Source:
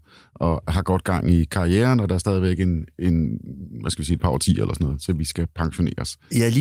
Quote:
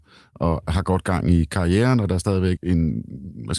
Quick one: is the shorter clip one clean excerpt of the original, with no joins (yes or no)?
no